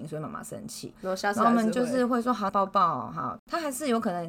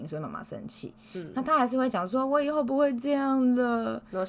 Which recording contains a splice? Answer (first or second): first